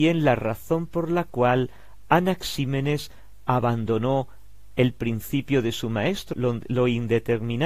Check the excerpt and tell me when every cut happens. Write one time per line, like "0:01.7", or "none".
0:06.3